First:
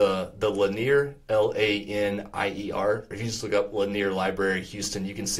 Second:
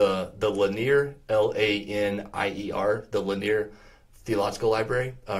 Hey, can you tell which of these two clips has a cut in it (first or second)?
first